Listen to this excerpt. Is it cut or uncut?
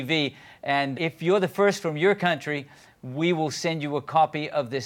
cut